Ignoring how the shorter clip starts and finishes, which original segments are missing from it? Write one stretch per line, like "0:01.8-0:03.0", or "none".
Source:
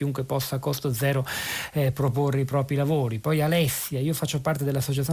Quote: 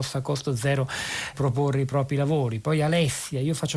0:01.7-0:01.9

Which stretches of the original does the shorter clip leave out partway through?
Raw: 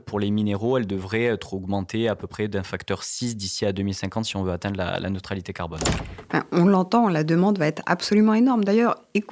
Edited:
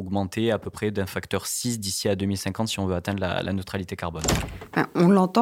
none

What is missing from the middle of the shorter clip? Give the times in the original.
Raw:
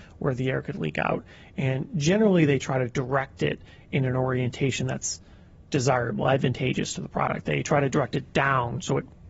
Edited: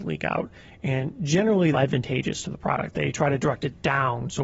0:02.5-0:06.2

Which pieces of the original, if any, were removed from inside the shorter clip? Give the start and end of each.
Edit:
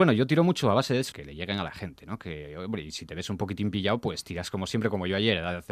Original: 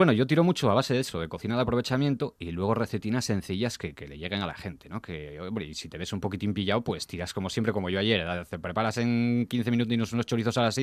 0:01.1-0:03.9

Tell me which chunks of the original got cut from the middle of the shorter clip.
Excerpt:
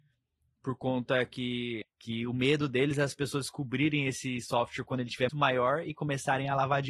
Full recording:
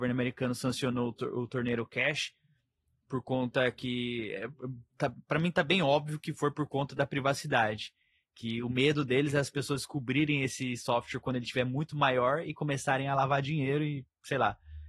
0:04.3-0:08.2
0:11.6-0:11.9

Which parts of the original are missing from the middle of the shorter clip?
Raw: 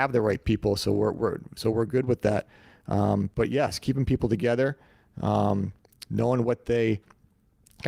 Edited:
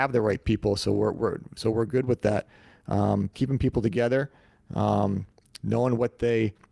0:03.3-0:03.8

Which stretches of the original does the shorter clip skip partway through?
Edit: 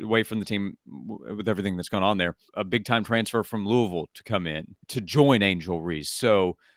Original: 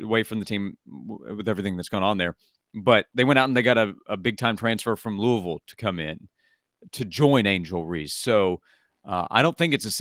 0:02.5-0:04.0
0:06.4-0:06.9

